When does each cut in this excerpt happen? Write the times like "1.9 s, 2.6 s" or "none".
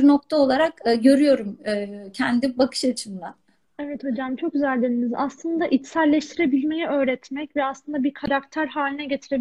none